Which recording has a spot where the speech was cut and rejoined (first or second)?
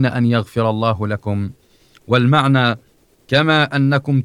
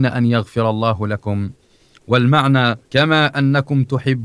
second